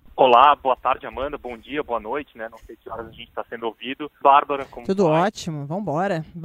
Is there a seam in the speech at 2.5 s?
no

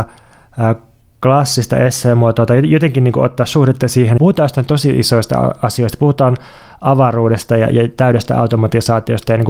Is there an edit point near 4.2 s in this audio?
yes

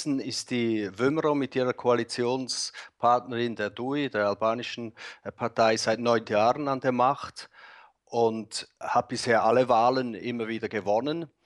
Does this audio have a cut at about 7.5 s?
no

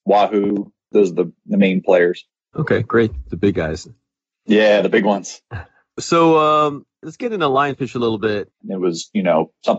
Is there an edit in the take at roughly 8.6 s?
yes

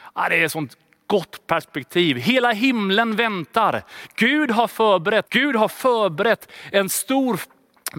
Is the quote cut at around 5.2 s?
yes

